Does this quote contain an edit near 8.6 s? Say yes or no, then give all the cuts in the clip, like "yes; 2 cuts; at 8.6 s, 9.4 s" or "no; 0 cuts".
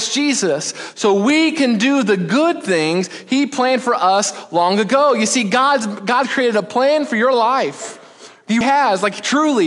yes; 1 cut; at 8.6 s